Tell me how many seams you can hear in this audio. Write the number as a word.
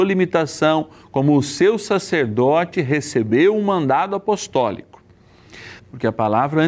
one